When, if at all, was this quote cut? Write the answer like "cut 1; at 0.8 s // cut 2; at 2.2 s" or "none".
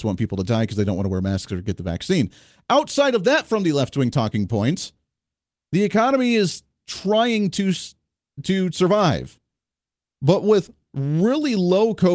none